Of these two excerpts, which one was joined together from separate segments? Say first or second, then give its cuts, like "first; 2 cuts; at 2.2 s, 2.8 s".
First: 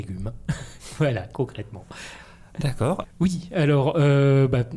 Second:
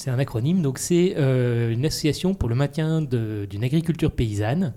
first; 1 cut; at 3.0 s